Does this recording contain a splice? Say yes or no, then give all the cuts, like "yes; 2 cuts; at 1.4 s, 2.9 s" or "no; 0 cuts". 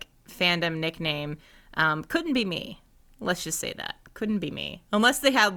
no; 0 cuts